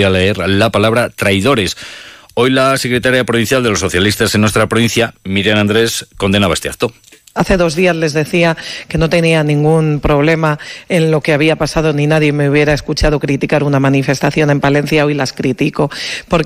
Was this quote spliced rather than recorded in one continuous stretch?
no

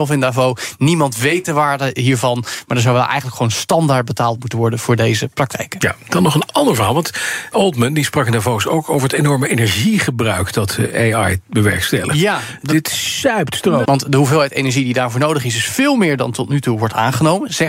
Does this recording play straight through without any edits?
no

